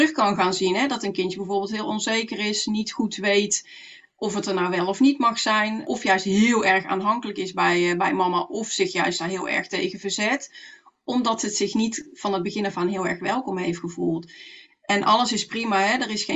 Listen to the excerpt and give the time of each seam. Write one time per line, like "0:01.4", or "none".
none